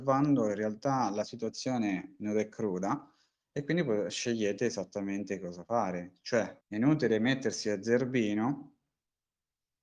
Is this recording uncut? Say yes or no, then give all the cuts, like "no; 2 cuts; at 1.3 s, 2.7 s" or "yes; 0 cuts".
no; 1 cut; at 6.6 s